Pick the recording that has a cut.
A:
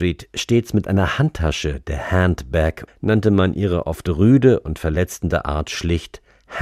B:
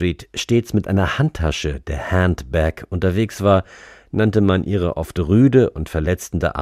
A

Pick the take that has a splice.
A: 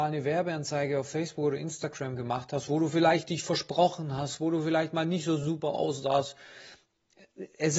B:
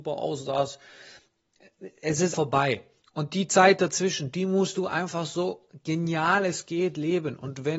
B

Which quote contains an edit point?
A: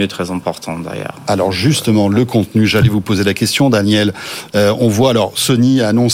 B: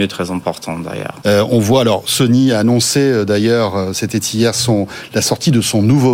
B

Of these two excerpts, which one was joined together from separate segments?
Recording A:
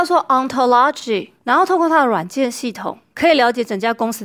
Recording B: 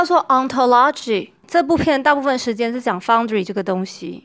B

